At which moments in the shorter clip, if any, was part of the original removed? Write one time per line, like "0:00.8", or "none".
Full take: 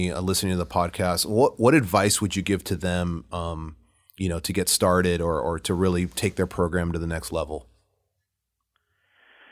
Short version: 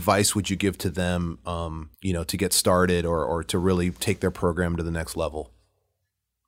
0:01.9